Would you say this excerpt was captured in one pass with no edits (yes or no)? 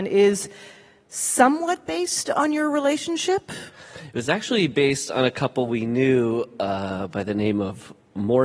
yes